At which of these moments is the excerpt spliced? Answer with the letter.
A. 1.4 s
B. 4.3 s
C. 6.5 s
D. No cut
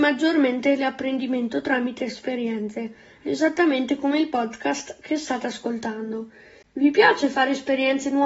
D